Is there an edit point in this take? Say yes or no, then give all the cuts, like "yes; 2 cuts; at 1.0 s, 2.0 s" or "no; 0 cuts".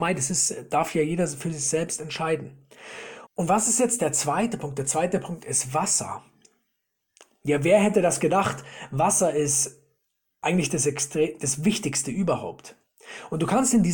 yes; 1 cut; at 3.3 s